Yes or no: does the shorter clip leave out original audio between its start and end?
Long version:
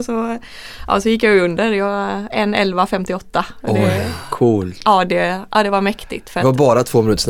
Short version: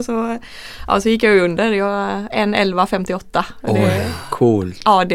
no